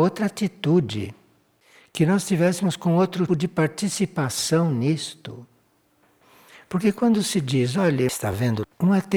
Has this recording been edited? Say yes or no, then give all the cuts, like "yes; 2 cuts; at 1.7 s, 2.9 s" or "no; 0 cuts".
yes; 1 cut; at 3.3 s